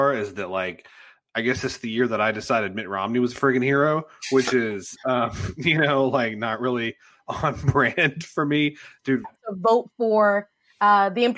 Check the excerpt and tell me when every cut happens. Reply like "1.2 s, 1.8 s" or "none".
9.2 s